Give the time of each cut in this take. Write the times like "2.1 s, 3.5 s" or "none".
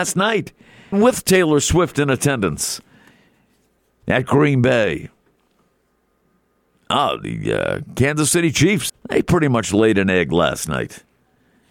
0.9 s, 8.9 s